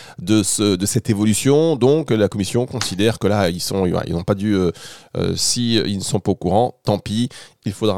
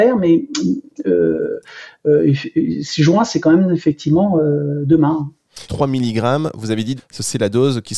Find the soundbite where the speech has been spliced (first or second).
second